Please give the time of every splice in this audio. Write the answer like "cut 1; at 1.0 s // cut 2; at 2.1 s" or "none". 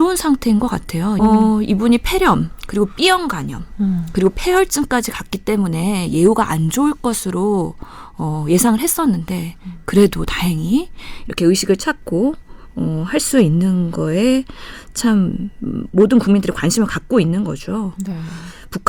cut 1; at 1.2 s